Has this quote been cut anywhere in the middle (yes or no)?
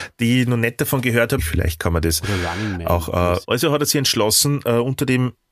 yes